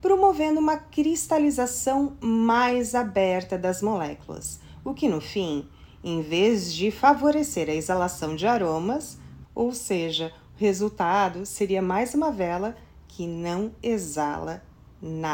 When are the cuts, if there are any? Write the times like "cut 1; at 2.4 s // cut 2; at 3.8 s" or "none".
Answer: cut 1; at 9.4 s